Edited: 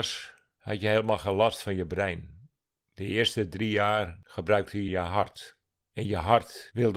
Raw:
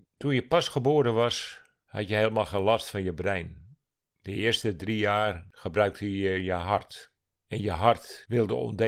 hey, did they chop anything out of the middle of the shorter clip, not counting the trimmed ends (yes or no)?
yes